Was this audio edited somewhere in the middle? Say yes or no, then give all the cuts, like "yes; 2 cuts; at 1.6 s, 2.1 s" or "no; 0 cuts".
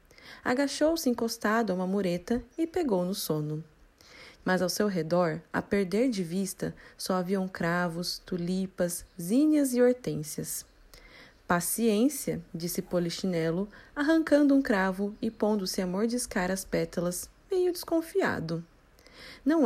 yes; 1 cut; at 4.4 s